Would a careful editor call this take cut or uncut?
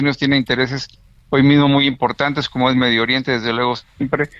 uncut